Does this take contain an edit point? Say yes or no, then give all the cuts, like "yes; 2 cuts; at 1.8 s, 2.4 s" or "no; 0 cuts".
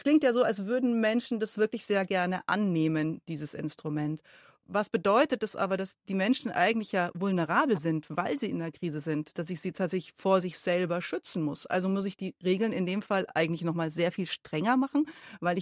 no; 0 cuts